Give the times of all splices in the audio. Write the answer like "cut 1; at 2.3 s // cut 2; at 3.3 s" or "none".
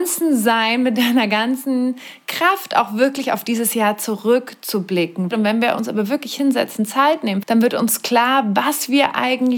cut 1; at 5.3 s // cut 2; at 7.4 s